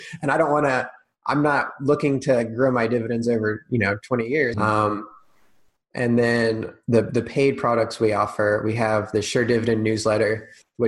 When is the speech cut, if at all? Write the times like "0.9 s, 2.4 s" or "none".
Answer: 4.5 s

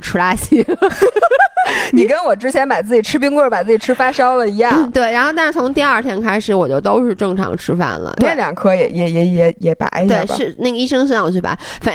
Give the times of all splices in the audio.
8.2 s

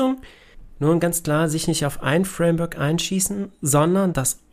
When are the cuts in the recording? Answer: none

